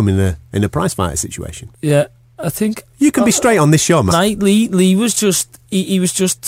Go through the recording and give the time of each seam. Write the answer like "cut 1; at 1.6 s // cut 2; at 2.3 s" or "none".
cut 1; at 1.7 s // cut 2; at 4.1 s